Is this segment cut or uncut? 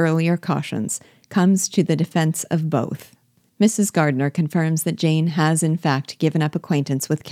cut